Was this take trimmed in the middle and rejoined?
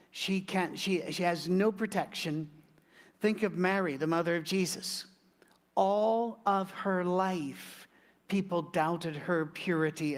no; 0 cuts

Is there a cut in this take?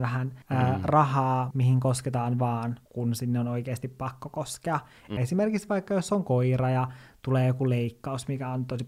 yes; 2 cuts; at 1.5 s, 5.2 s

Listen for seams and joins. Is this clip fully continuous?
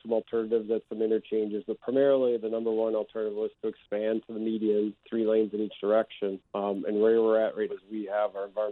no; 2 cuts; at 6.4 s, 7.7 s

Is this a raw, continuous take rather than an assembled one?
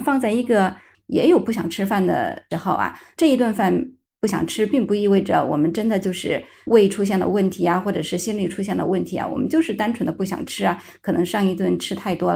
no; 1 cut; at 0.9 s

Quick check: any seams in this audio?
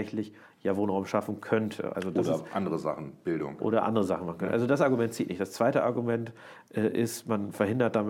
no; 0 cuts

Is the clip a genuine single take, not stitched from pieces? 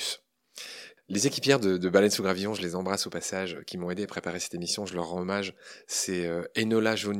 yes; 0 cuts

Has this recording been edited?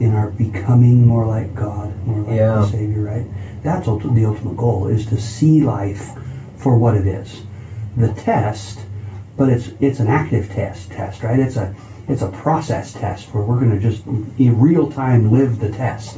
no; 0 cuts

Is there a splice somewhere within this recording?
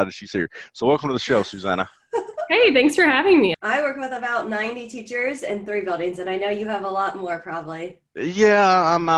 yes; 1 cut; at 3.5 s

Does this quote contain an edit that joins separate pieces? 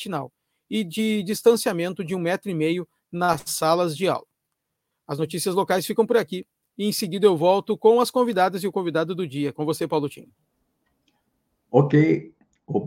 no; 0 cuts

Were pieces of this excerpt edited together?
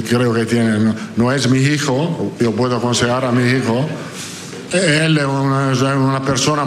yes; 1 cut; at 4.7 s

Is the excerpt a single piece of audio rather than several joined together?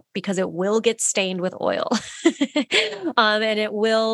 yes; 0 cuts

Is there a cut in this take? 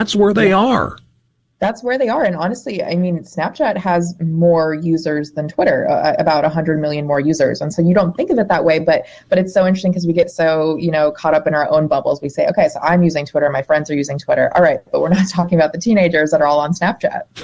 no; 0 cuts

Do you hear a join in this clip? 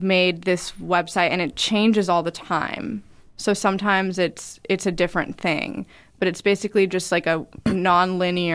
no; 0 cuts

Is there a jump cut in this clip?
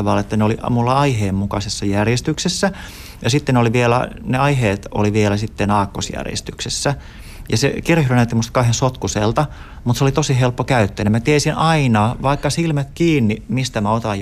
no; 0 cuts

